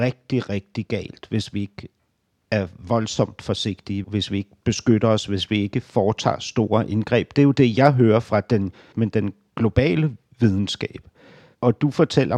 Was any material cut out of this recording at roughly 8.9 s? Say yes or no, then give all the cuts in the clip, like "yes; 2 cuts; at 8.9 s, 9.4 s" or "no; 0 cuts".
yes; 2 cuts; at 4.0 s, 8.9 s